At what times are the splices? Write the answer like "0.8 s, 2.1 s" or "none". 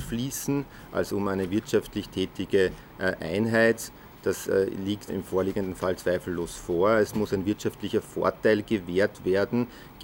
5.1 s